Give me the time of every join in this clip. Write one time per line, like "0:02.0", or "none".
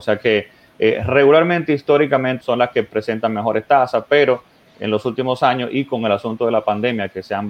0:02.4